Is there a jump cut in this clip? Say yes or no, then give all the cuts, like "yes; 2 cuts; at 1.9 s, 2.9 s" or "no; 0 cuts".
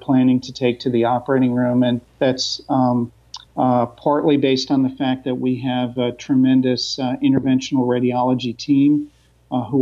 yes; 2 cuts; at 2.1 s, 3.5 s